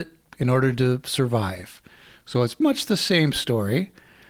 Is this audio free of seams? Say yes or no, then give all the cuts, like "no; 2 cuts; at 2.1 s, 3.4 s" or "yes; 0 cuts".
no; 1 cut; at 2.6 s